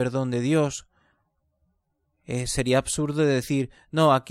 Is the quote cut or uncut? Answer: uncut